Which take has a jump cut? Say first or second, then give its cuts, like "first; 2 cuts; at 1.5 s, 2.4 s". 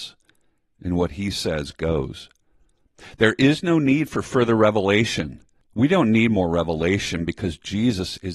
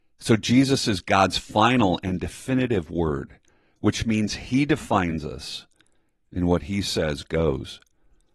first; 1 cut; at 5.7 s